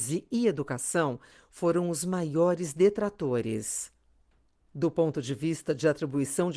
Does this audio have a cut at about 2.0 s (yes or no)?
no